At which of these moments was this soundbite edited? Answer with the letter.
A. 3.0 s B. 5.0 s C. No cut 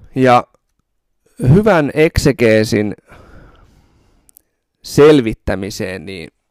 C